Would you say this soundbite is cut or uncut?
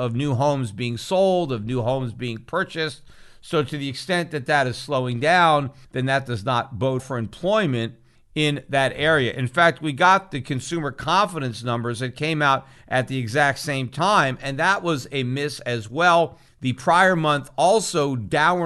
cut